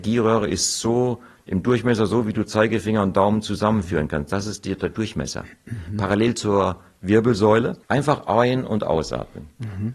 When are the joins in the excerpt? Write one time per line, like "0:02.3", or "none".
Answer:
0:07.8